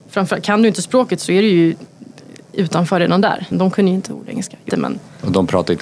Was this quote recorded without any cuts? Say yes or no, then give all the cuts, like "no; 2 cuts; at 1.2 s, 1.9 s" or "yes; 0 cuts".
no; 2 cuts; at 3.5 s, 4.7 s